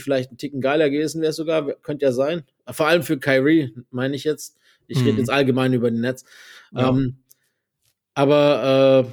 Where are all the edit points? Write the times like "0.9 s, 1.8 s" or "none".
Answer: none